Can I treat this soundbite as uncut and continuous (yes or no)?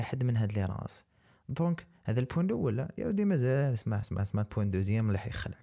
no